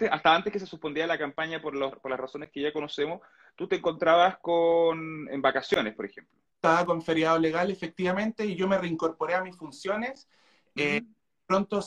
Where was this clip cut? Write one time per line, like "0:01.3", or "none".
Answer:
none